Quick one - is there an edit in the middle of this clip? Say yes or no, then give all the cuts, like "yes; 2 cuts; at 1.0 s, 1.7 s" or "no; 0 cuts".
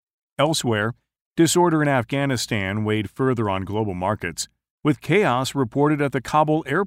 no; 0 cuts